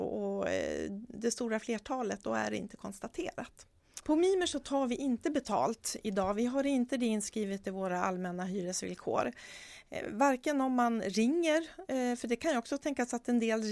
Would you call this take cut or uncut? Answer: cut